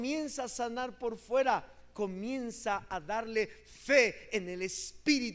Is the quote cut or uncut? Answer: uncut